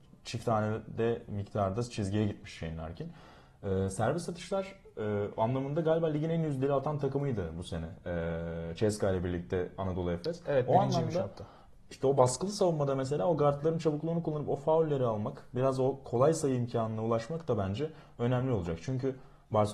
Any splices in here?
no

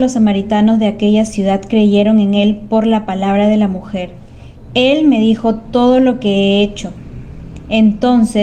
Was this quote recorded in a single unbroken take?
no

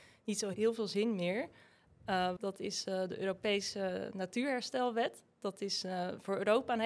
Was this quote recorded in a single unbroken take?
no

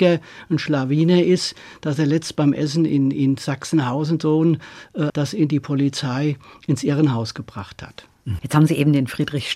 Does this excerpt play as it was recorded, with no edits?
no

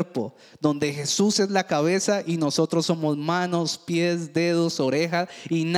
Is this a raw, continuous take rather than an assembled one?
yes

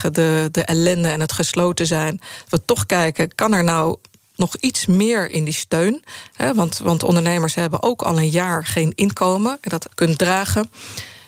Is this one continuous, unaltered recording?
no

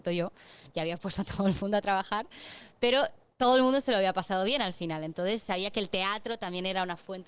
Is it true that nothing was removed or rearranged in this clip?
yes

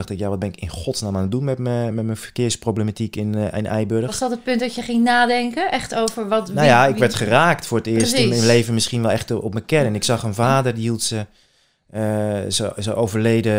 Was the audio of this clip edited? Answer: no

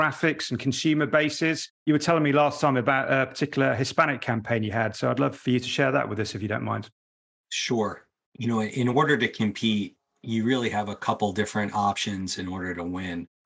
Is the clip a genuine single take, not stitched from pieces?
yes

